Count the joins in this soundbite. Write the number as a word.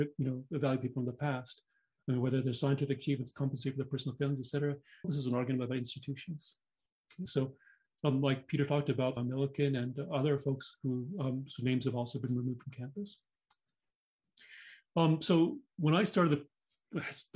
three